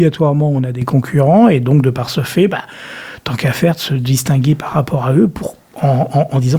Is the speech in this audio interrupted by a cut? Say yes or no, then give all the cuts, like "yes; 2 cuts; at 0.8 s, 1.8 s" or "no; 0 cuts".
no; 0 cuts